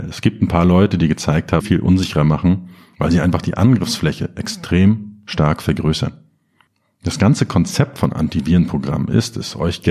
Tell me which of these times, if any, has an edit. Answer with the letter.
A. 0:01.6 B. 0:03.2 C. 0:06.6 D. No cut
A